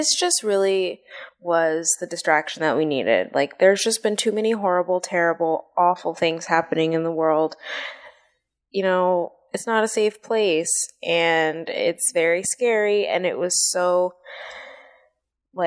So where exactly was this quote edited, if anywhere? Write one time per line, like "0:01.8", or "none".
none